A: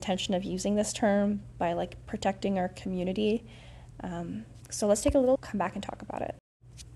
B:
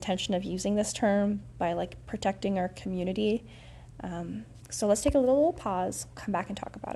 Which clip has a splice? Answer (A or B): A